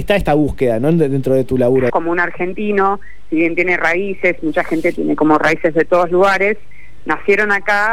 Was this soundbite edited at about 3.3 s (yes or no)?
no